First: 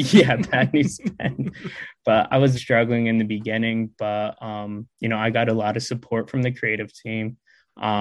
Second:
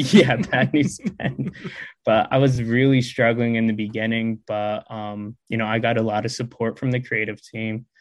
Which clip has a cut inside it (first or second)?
first